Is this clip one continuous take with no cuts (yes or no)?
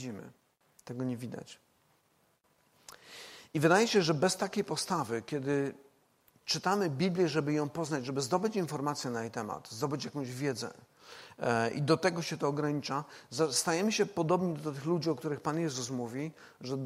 yes